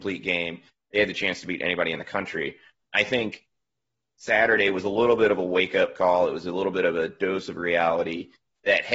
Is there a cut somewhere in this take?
no; 0 cuts

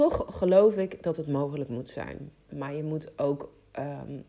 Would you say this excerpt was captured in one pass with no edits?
no; 1 cut; at 2.5 s

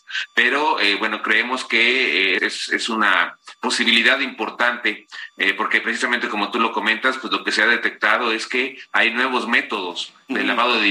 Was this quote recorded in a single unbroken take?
no; 1 cut; at 2.4 s

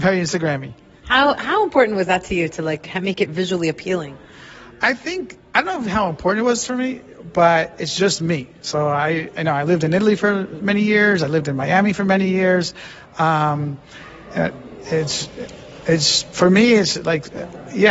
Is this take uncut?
yes; 0 cuts

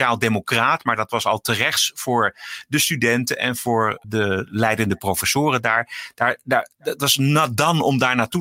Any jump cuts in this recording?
yes; 1 cut; at 4.0 s

